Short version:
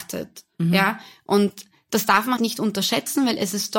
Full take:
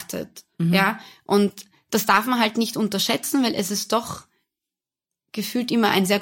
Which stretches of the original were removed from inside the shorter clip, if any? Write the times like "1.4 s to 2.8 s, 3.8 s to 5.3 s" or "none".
2.4 s to 2.5 s

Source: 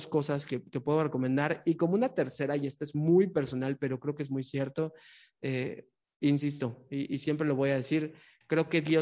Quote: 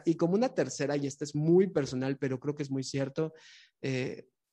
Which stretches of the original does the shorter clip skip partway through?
none

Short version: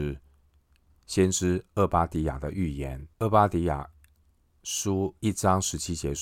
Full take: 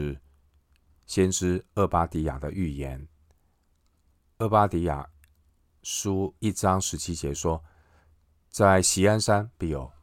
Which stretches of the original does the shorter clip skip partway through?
3.1 s to 4.3 s

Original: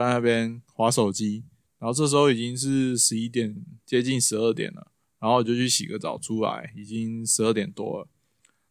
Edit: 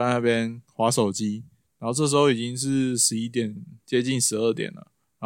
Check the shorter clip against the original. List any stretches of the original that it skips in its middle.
none

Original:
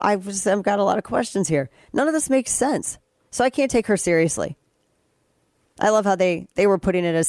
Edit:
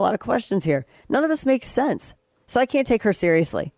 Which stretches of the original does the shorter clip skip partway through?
none

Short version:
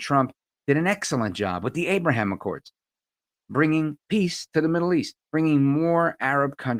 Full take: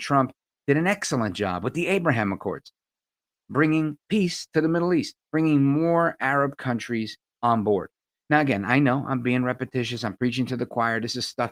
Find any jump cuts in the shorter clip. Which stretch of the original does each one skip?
none

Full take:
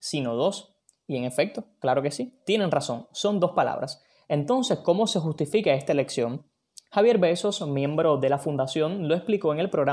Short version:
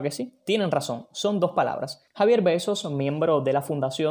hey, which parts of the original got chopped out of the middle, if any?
4.1 s to 6.8 s

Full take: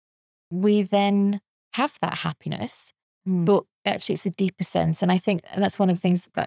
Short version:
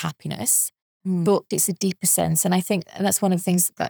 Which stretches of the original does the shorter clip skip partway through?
3.7 s to 4.1 s

